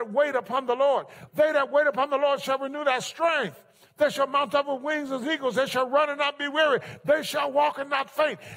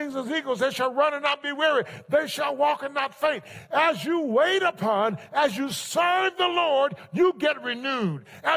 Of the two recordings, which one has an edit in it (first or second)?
first